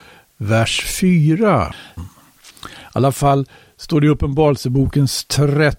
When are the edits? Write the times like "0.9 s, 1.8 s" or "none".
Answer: 2.0 s